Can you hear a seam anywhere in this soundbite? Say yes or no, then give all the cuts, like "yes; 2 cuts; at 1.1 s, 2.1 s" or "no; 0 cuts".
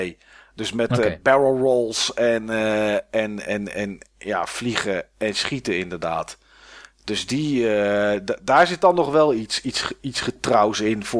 no; 0 cuts